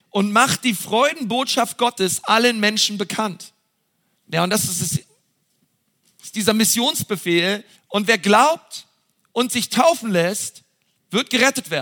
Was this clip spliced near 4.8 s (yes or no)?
no